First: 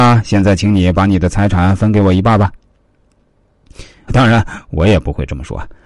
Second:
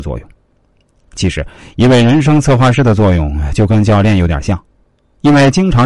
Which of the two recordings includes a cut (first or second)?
first